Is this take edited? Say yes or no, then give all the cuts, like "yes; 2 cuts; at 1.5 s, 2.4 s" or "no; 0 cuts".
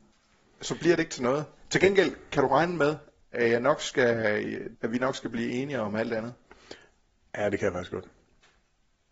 yes; 2 cuts; at 4.7 s, 7.3 s